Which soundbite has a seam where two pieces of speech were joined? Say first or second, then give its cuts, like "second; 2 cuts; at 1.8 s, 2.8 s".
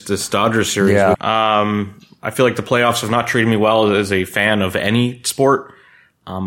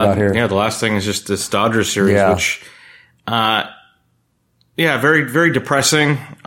first; 1 cut; at 1.1 s